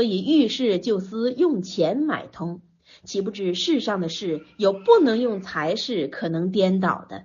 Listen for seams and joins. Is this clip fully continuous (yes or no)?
yes